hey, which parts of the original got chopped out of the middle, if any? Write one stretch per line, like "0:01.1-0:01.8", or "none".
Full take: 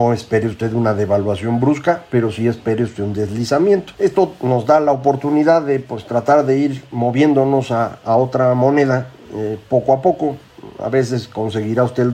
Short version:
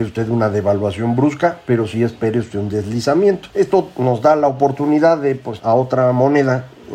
0:06.0-0:08.0

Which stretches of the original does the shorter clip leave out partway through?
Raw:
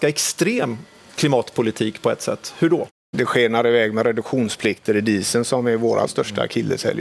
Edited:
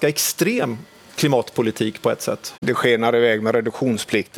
0:02.5-0:03.1

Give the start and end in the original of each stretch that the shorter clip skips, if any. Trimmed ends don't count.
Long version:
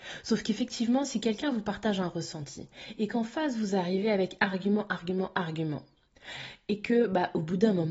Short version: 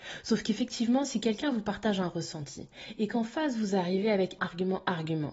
0:04.4-0:04.9

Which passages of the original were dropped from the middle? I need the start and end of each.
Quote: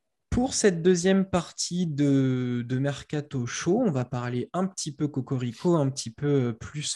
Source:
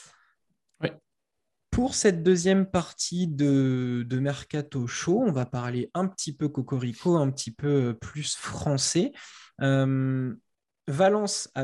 none

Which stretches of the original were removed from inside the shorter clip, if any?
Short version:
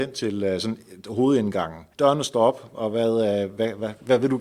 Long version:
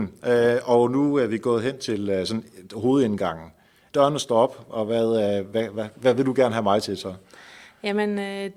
0:03.6-0:03.9

